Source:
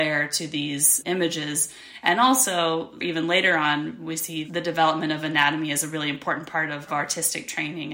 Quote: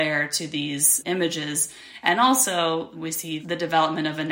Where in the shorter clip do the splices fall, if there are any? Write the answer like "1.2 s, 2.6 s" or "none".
2.9 s

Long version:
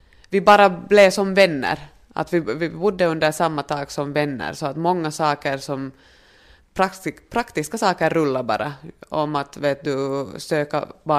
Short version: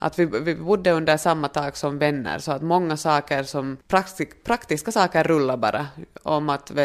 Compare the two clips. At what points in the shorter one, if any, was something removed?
3.8 s

